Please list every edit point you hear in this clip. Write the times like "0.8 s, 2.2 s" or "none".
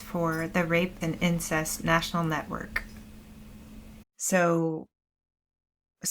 1.0 s, 4.0 s